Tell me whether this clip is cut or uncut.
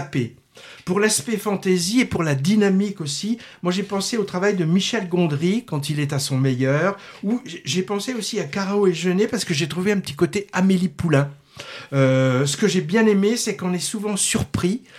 uncut